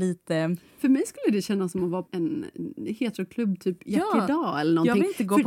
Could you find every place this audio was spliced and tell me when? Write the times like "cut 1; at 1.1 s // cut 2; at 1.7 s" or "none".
cut 1; at 2.1 s